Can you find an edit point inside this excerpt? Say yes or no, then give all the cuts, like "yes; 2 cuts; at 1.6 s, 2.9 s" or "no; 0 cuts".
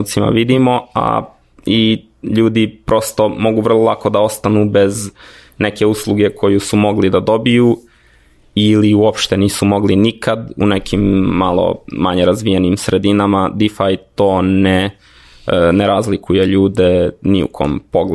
no; 0 cuts